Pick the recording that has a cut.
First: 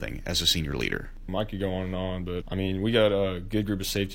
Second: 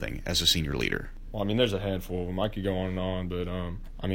first; 2 cuts; at 1.3 s, 2.4 s

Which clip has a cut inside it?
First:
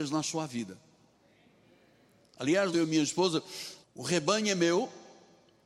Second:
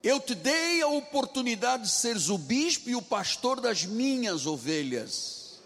first; 2 cuts; at 2.7 s, 3.8 s

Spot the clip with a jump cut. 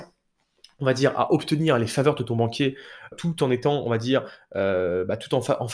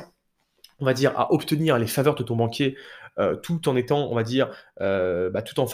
first; 1 cut; at 3.1 s

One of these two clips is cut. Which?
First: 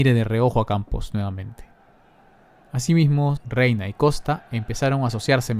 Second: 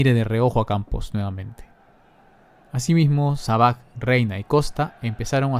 first; 1 cut; at 3.4 s

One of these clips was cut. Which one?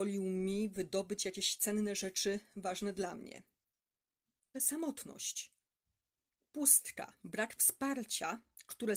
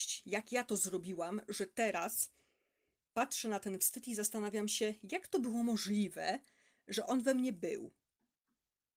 first; 1 cut; at 4.5 s

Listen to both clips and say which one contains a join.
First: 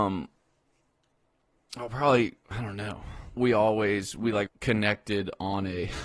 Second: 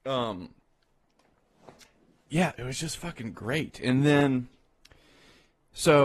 first; 2 cuts; at 3.4 s, 4.5 s

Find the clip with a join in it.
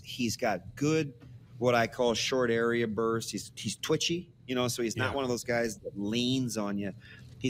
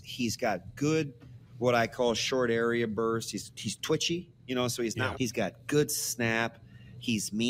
second; 1 cut; at 5.1 s

